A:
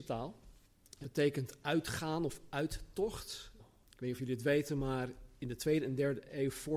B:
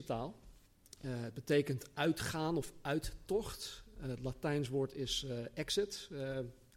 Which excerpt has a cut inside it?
A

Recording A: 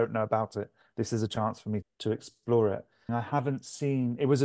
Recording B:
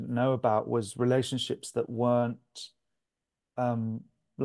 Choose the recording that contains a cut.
A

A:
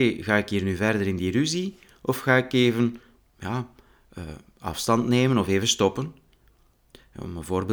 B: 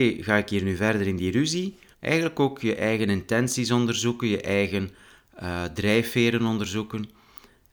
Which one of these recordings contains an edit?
B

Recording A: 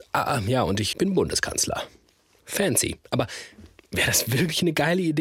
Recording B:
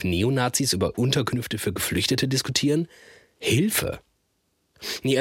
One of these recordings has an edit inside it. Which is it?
A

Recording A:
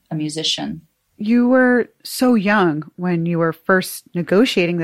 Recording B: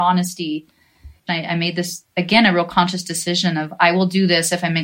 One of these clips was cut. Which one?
B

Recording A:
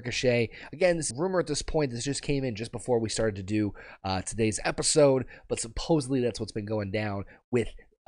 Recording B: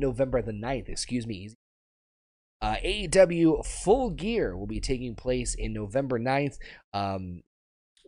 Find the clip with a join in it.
A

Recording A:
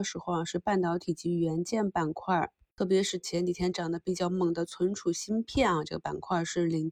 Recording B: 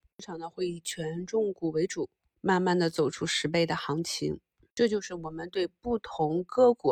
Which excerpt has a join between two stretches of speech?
B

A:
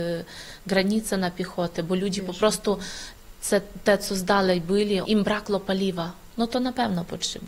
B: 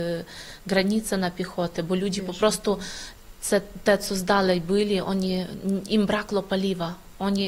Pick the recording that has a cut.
A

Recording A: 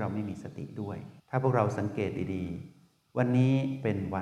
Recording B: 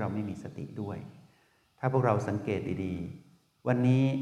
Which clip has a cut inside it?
A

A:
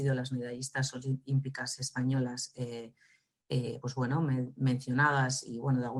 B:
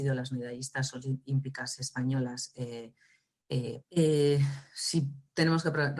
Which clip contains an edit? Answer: B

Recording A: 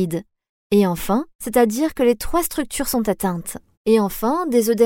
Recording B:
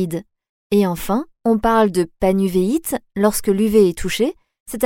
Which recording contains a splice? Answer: A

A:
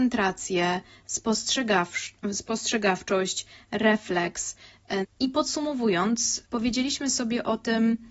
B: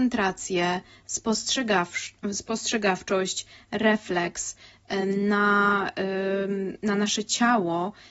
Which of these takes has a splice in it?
A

